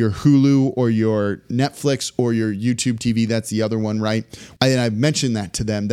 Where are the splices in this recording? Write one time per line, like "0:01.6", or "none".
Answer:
0:04.6